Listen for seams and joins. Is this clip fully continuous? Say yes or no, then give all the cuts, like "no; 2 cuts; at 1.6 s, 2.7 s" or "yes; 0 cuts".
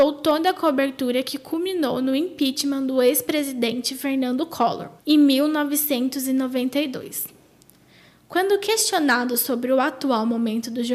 no; 1 cut; at 5.0 s